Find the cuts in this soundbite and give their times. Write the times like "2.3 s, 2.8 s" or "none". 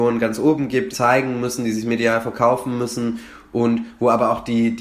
0.9 s

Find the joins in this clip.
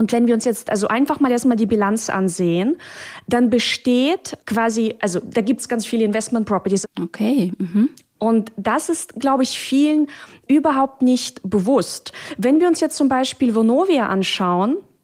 5.7 s, 6.8 s

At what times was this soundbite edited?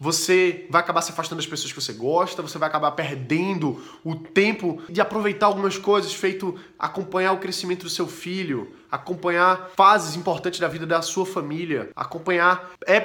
4.9 s

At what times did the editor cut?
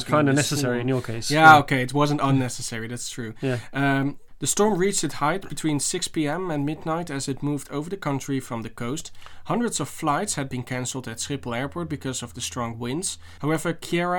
none

